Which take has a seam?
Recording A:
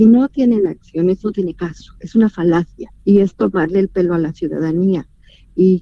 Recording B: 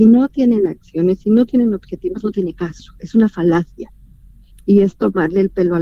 A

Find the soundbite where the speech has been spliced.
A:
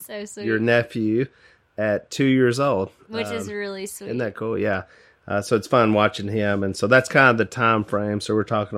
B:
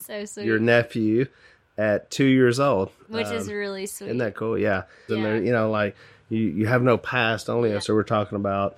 B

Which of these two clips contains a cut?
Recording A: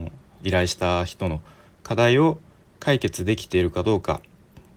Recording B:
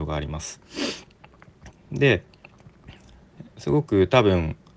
B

